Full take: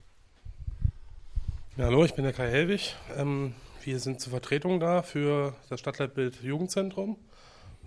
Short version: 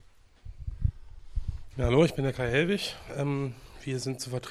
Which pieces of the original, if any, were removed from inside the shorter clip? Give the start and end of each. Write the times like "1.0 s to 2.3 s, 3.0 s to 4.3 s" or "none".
none